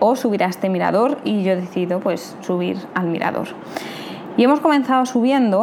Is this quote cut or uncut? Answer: uncut